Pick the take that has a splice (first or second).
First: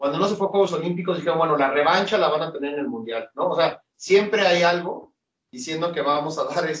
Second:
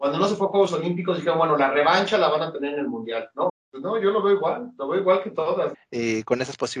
second